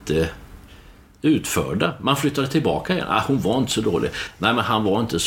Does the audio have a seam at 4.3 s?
no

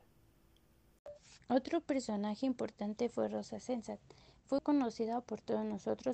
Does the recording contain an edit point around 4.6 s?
yes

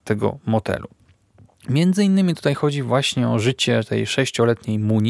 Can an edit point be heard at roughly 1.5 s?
no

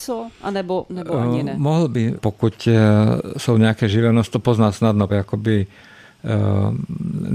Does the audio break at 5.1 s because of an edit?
yes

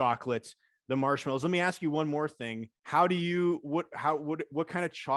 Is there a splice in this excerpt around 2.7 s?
yes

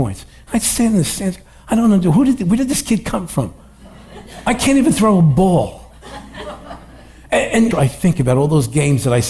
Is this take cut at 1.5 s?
no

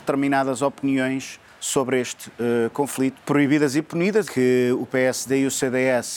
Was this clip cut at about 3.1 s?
yes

